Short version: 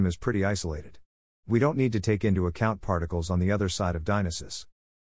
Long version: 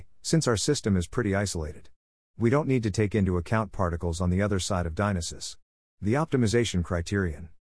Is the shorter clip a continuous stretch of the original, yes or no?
yes